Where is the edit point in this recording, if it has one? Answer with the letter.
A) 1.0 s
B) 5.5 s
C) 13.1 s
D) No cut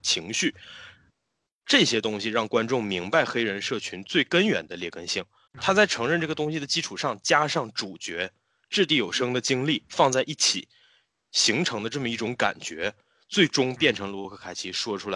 B